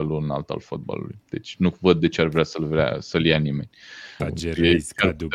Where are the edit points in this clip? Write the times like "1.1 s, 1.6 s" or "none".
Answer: 4.2 s